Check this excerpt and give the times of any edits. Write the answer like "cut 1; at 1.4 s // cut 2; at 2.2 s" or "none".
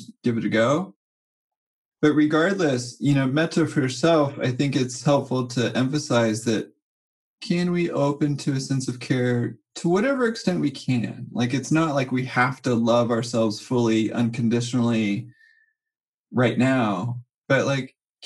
none

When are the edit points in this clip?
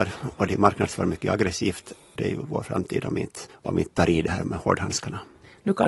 cut 1; at 2.2 s // cut 2; at 3.5 s

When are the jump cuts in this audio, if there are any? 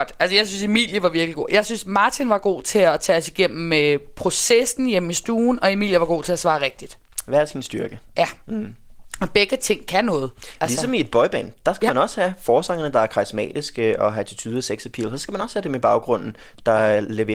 none

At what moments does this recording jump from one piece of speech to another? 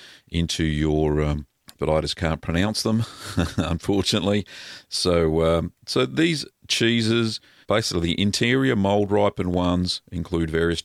cut 1; at 1.8 s // cut 2; at 7.6 s

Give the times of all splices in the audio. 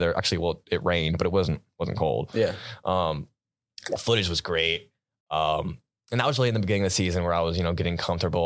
none

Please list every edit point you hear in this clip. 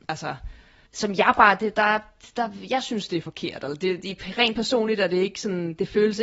none

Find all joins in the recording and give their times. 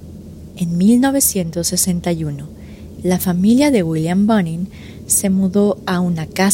cut 1; at 3.0 s

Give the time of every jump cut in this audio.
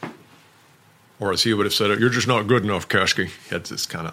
none

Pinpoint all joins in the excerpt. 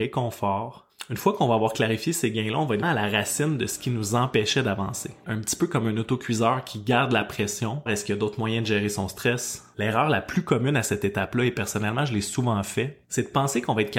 cut 1; at 2.8 s // cut 2; at 5.2 s // cut 3; at 7.9 s

